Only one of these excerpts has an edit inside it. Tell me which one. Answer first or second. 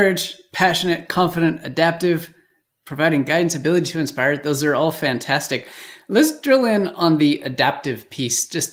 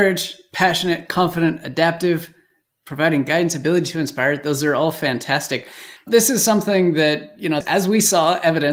second